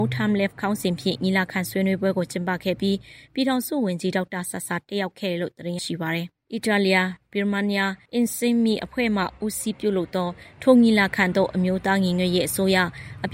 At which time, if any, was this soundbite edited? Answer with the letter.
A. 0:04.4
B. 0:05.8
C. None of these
B